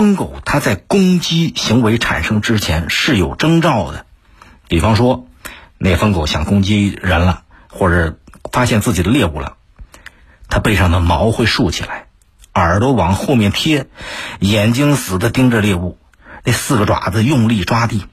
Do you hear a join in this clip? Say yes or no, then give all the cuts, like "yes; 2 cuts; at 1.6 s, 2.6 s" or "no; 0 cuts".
yes; 2 cuts; at 15.0 s, 16.4 s